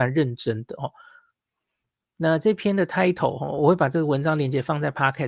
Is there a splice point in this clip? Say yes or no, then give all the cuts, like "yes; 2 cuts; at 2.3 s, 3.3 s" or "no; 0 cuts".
no; 0 cuts